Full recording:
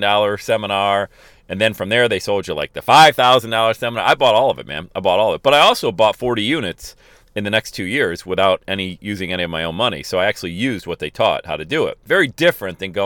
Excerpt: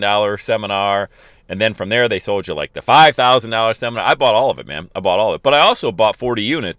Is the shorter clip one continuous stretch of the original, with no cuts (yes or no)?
yes